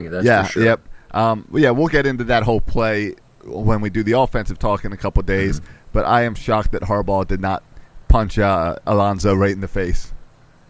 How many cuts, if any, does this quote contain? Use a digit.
0